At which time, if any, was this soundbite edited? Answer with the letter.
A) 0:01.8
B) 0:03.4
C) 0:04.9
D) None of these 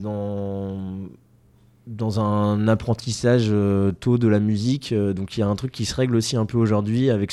D